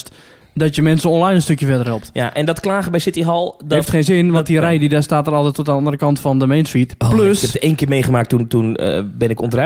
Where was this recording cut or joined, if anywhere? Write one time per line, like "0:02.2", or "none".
none